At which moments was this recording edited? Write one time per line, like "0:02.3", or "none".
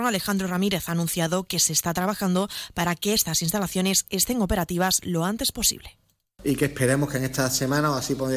none